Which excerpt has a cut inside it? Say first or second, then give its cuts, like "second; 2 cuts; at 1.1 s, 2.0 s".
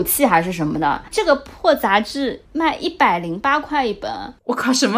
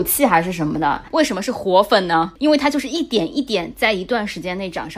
second; 1 cut; at 1.1 s